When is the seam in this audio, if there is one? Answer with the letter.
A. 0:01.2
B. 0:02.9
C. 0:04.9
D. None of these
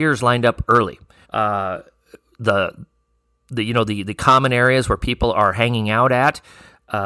A